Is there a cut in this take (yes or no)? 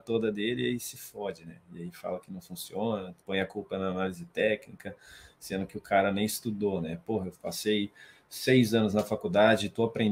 no